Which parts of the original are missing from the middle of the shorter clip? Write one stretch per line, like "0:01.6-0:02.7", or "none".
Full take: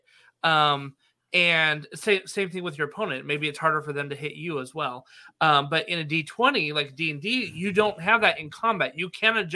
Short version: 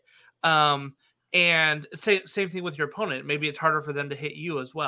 none